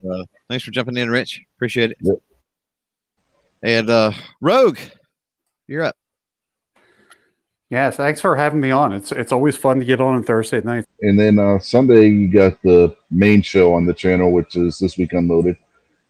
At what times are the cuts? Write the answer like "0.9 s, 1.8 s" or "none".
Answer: 10.8 s